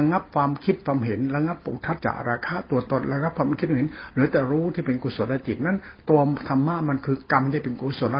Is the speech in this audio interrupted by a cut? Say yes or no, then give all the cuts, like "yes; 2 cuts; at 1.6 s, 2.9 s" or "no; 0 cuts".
yes; 1 cut; at 2.0 s